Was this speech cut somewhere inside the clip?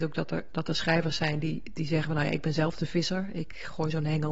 no; 0 cuts

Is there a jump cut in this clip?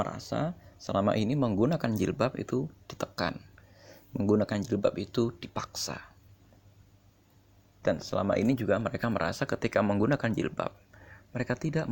no; 0 cuts

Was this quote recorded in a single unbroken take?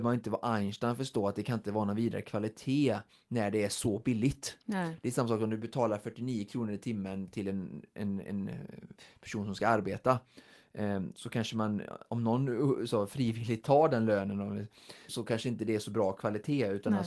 no; 1 cut; at 15.1 s

